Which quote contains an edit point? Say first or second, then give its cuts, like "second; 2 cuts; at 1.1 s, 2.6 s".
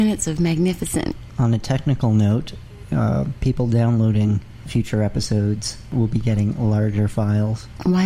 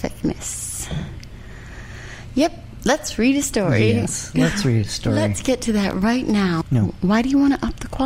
second; 1 cut; at 6.6 s